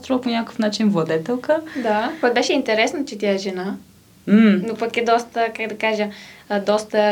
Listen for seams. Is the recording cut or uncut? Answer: uncut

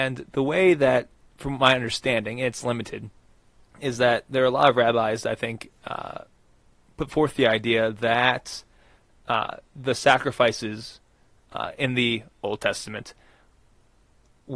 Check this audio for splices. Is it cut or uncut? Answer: uncut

